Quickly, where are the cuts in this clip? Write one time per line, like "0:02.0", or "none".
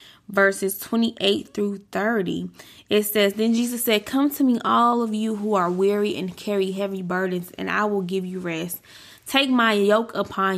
none